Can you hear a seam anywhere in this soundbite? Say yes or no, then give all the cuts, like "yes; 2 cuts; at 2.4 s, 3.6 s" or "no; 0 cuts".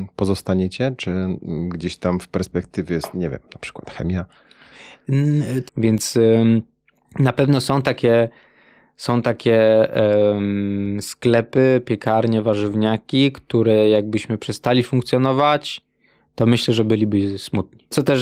yes; 1 cut; at 5.7 s